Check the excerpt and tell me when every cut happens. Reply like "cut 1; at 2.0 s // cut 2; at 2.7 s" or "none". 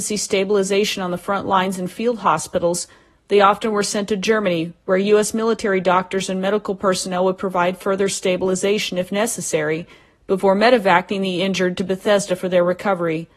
none